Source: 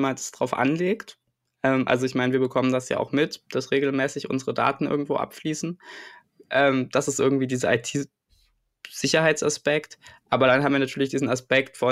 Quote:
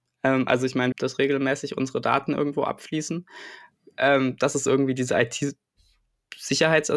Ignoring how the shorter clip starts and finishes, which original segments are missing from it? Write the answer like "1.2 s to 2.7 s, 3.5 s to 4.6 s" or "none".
2.3 s to 3.4 s